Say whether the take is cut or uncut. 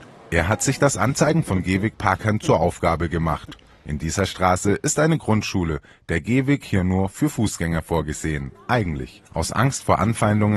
cut